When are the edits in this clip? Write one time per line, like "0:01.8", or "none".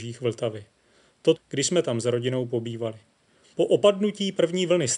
0:01.4
0:03.5